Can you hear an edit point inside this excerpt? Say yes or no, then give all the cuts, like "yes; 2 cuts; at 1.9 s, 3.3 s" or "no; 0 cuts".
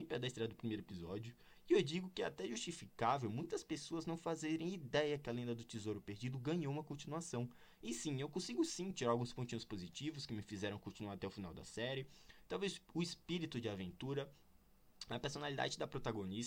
no; 0 cuts